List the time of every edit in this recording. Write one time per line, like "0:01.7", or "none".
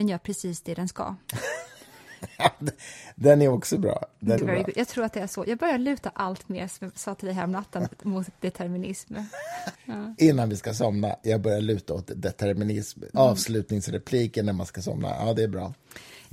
0:04.4
0:09.8
0:13.1